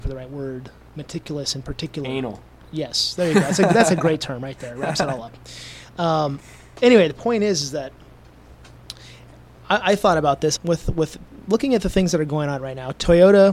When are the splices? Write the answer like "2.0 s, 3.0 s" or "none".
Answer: 10.6 s

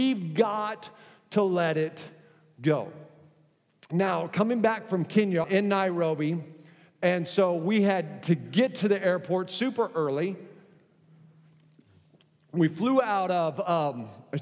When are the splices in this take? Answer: 5.4 s

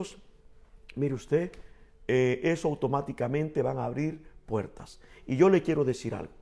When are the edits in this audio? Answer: none

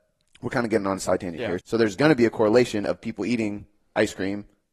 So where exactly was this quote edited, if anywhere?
1.6 s

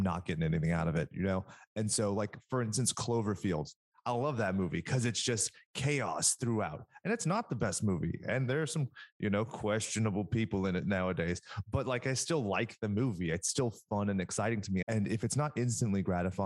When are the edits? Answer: 14.8 s

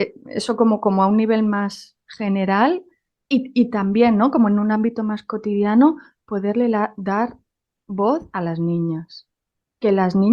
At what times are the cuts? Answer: none

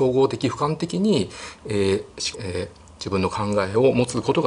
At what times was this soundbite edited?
2.3 s

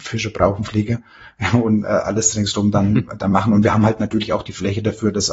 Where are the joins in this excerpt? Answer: none

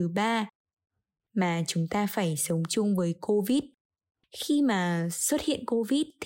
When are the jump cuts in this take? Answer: 4.2 s

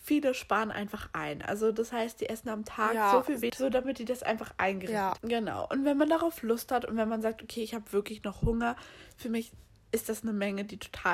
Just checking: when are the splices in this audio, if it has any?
3.5 s, 5.2 s

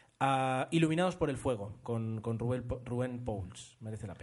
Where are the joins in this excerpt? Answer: 1.8 s

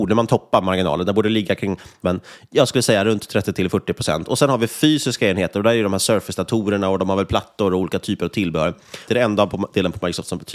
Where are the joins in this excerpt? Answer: 2.0 s, 4.2 s, 9.1 s

